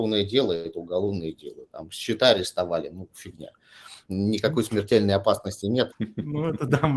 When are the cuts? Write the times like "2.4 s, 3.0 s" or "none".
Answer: 5.9 s